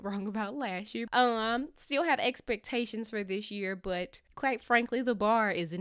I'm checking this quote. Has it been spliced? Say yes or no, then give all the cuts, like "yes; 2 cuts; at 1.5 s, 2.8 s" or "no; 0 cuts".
yes; 1 cut; at 1.1 s